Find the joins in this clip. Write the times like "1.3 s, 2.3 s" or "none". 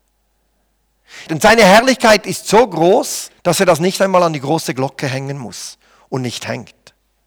1.3 s, 3.4 s